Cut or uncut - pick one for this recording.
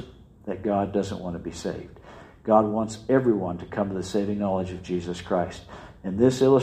uncut